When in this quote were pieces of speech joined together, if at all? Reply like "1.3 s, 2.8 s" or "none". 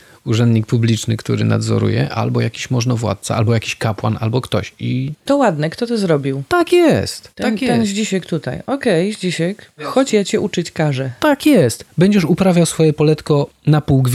none